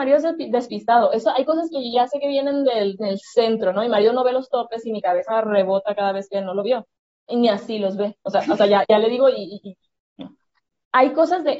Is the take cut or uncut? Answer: cut